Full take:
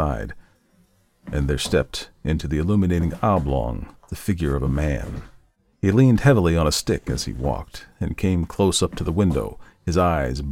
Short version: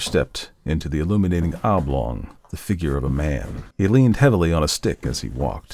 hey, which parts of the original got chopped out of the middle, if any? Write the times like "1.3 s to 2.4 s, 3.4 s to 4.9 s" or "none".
5.3 s to 5.7 s